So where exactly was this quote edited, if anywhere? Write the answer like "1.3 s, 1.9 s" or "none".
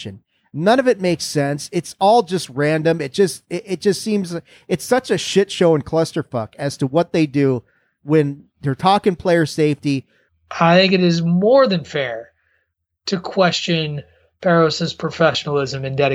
10.3 s